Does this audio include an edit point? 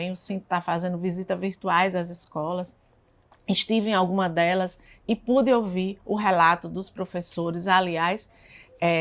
no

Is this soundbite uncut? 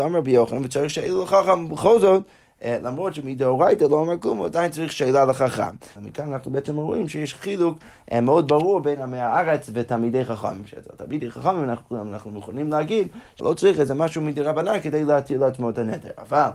no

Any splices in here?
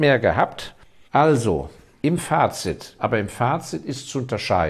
yes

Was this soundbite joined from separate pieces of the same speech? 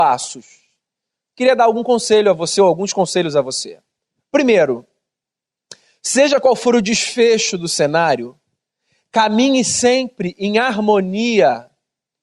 no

